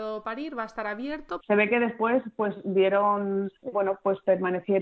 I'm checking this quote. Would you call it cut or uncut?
cut